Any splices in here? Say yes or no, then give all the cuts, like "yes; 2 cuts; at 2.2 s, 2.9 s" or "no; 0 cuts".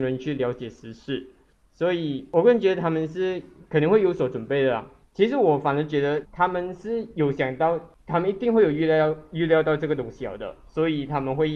yes; 2 cuts; at 5.0 s, 6.2 s